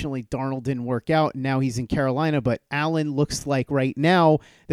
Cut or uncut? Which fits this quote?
uncut